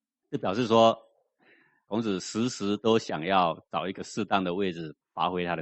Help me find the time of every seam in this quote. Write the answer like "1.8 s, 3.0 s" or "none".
none